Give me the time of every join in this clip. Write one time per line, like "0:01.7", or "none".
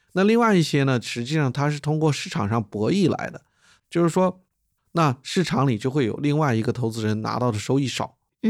0:04.8